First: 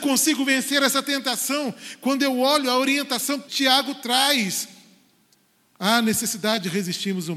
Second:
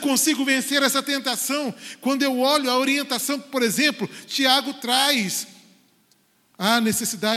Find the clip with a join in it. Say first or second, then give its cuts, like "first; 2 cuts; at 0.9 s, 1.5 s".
first; 1 cut; at 3.5 s